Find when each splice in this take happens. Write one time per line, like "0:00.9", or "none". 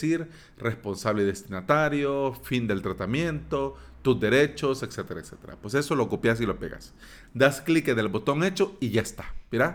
none